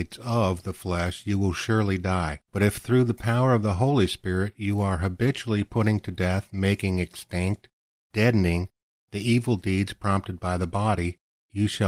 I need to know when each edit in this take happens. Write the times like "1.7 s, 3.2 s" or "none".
2.5 s